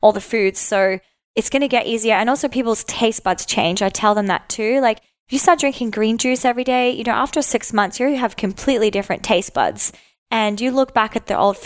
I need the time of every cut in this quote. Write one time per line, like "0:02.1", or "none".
none